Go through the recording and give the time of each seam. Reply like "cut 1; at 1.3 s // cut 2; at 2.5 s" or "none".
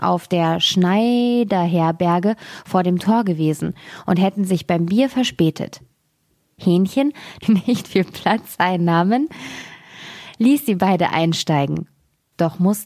cut 1; at 7.4 s